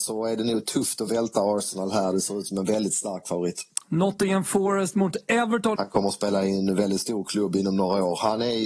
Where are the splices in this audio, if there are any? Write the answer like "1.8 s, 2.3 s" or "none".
5.7 s